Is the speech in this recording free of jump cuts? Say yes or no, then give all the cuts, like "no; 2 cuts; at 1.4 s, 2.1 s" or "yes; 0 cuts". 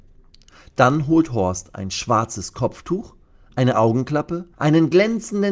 no; 1 cut; at 4.5 s